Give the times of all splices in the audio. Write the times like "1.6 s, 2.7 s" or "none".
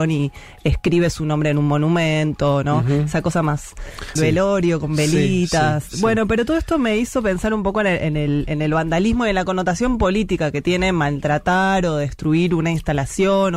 4.2 s